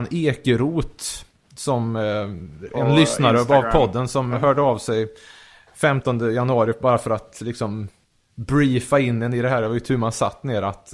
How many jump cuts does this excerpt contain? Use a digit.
0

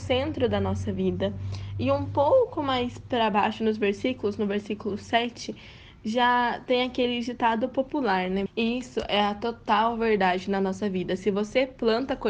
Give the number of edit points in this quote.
1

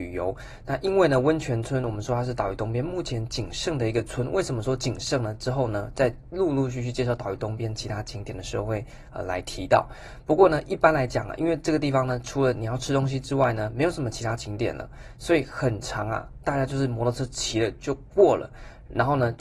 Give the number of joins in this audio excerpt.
0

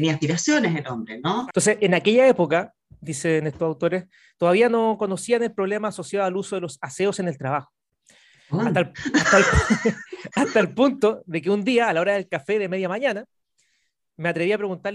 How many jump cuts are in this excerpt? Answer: 2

